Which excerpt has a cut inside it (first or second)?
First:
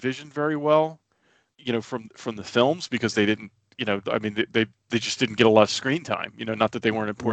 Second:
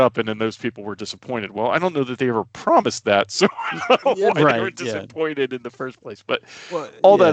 first